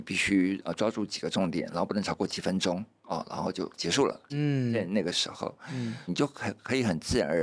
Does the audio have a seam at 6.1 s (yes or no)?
yes